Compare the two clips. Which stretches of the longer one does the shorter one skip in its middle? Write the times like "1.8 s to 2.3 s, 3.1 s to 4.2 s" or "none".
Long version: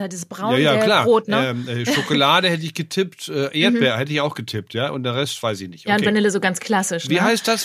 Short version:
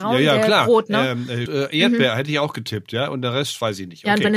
1.8 s to 3.3 s